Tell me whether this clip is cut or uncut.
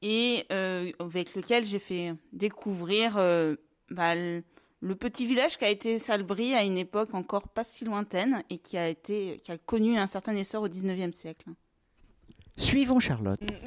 uncut